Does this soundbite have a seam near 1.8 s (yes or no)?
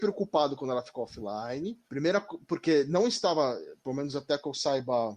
yes